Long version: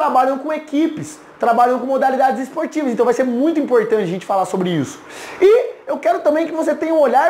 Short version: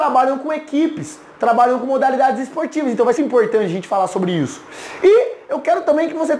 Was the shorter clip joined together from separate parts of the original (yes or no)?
yes